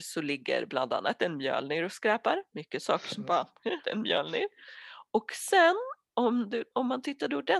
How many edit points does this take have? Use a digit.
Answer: 1